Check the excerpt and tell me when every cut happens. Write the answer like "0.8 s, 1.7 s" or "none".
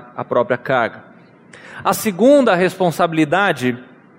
none